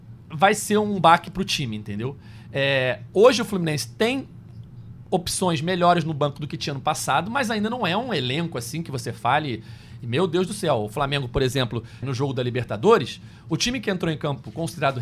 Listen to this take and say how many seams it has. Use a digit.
1